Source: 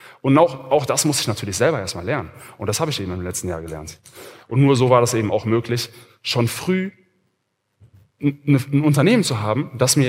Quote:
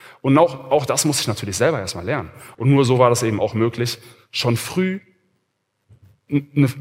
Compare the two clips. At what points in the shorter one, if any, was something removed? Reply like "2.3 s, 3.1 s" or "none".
2.5 s